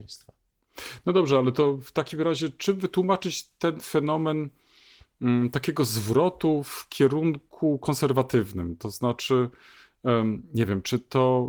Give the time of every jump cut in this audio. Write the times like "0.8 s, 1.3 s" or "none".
none